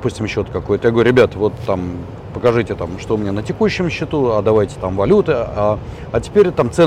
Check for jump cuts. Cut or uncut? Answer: uncut